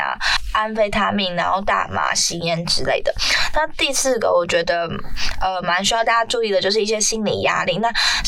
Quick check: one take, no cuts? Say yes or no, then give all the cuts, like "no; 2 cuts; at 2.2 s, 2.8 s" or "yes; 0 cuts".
yes; 0 cuts